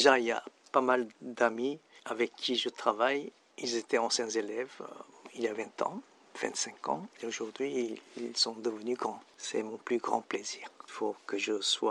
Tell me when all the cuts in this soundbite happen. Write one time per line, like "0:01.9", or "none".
0:10.9